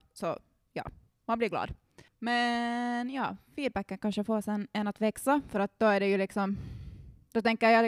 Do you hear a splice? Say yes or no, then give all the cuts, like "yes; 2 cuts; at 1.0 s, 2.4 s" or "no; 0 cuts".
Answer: yes; 1 cut; at 2.1 s